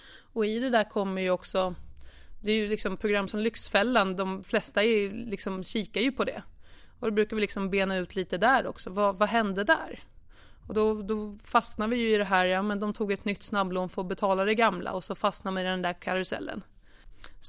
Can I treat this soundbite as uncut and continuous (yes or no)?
yes